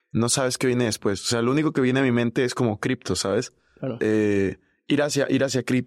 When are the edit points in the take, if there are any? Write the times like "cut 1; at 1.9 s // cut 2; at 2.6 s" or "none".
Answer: cut 1; at 4.0 s